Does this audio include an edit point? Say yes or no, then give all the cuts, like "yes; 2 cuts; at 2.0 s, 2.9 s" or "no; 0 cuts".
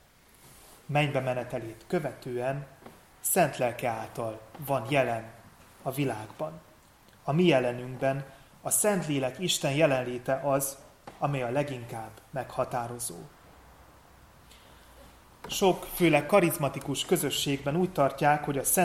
no; 0 cuts